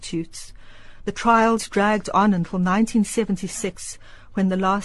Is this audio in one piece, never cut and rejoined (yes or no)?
yes